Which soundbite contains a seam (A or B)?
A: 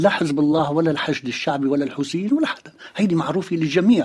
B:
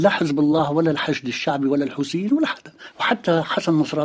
B